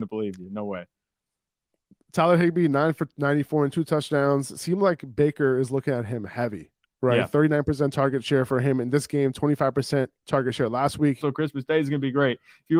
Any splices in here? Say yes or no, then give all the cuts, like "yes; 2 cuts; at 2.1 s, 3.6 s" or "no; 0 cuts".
yes; 1 cut; at 11.2 s